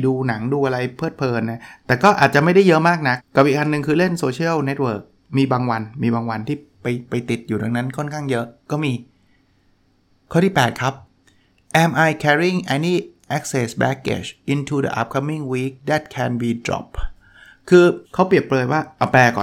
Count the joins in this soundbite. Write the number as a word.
two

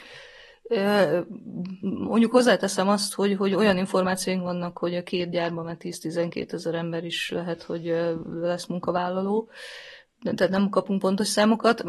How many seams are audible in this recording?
one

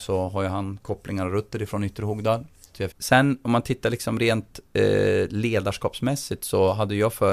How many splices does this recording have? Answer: one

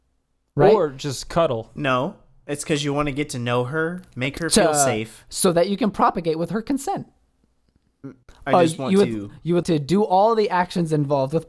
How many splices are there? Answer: two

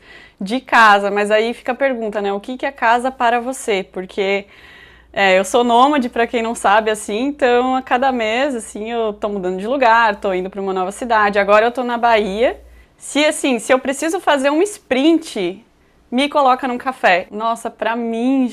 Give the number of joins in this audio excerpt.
two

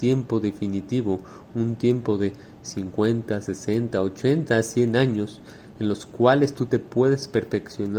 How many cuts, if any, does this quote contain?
zero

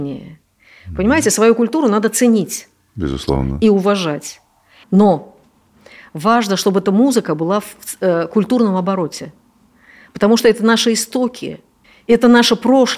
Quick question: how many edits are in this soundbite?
one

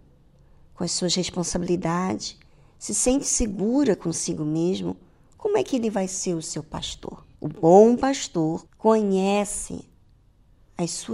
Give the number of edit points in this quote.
two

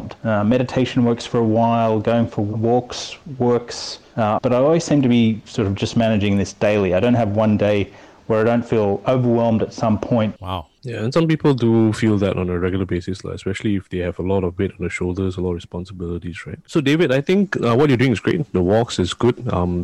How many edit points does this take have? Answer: two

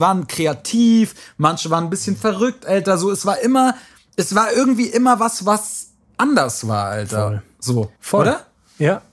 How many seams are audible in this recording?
one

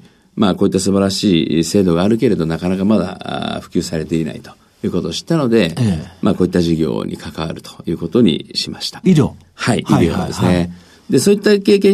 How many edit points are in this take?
one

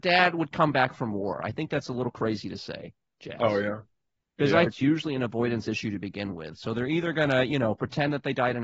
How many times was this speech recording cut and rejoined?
one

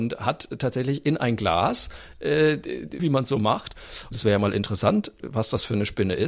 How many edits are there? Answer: three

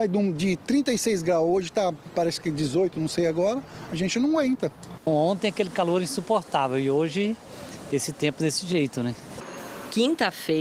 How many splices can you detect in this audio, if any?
one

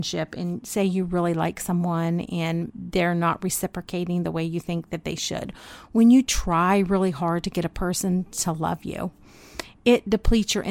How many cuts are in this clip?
one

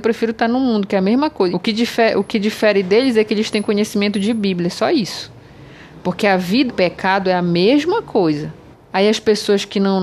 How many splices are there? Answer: three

